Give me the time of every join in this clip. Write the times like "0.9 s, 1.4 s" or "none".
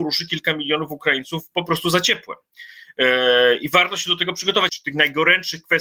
4.7 s